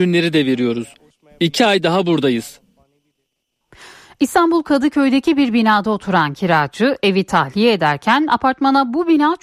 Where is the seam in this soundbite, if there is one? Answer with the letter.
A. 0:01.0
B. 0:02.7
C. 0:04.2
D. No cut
D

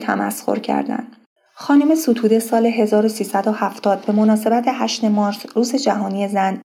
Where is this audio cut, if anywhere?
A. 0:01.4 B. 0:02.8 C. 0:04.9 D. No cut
A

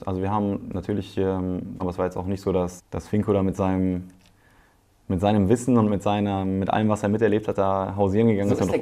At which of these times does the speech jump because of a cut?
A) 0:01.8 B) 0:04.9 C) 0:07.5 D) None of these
A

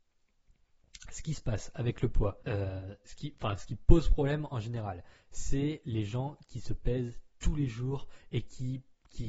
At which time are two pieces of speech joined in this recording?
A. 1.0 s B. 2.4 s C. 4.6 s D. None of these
B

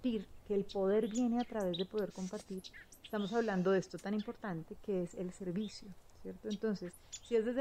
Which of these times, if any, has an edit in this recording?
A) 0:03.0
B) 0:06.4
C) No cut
C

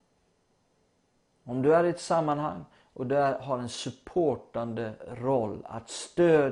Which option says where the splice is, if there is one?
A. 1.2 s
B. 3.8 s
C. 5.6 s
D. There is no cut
D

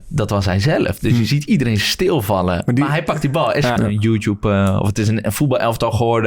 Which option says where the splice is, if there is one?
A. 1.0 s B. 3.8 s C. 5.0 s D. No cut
B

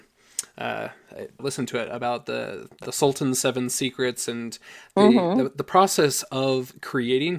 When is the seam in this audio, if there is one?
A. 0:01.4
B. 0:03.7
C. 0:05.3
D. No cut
A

